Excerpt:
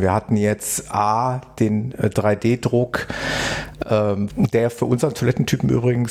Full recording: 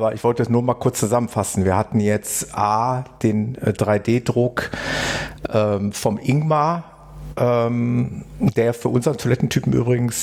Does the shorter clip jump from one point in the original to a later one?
yes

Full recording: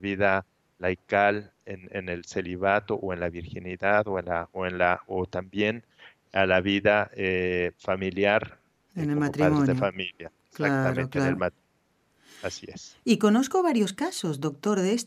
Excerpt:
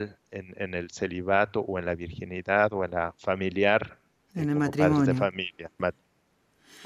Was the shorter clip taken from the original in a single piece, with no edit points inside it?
no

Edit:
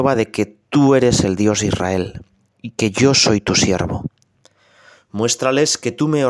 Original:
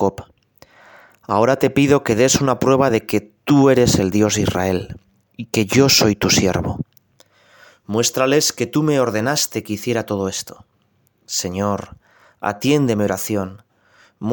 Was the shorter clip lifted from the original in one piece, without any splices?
yes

